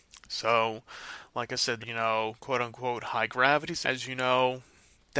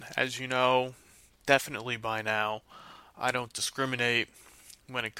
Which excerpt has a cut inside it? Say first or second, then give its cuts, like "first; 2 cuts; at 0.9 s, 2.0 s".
first; 2 cuts; at 1.8 s, 3.8 s